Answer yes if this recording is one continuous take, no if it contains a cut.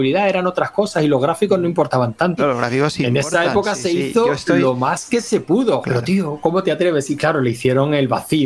no